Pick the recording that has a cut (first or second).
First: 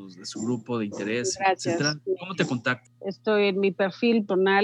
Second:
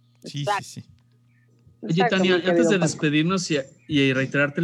first